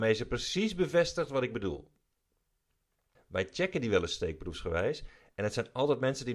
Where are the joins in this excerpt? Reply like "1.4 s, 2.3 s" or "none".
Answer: 3.1 s